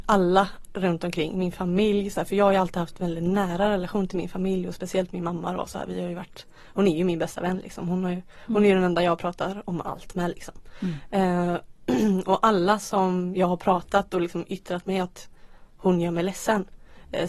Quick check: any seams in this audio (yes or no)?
no